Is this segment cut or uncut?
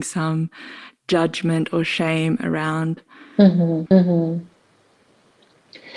cut